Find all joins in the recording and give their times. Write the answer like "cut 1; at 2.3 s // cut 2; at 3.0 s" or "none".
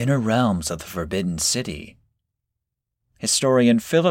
none